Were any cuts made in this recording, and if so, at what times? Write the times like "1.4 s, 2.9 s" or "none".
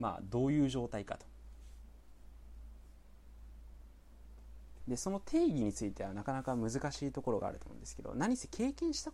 4.8 s